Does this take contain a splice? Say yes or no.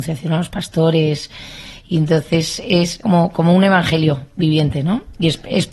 yes